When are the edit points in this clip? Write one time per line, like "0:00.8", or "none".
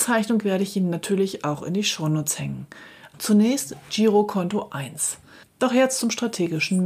0:03.1
0:05.4